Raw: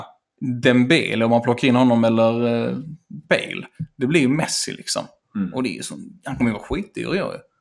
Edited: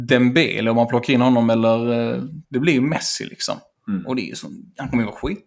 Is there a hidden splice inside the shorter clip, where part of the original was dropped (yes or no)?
yes